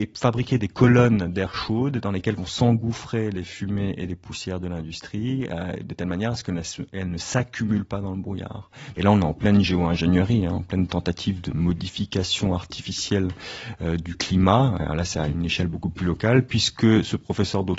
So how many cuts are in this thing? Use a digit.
1